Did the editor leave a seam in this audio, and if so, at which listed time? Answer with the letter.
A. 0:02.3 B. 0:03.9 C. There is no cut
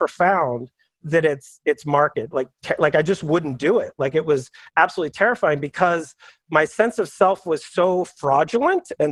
A